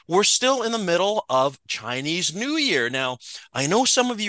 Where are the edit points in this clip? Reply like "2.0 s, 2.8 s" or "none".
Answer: none